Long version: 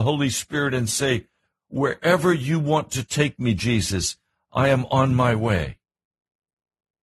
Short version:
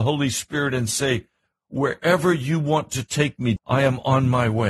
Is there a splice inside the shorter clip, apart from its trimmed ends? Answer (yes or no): yes